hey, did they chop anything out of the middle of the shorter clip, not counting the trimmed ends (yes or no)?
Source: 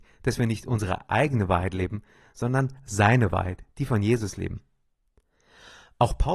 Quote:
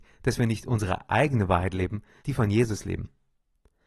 yes